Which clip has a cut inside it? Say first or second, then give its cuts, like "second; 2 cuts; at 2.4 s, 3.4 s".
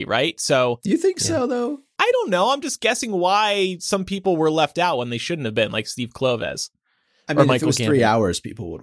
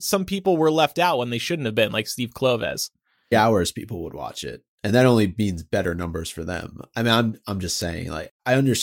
second; 1 cut; at 3.3 s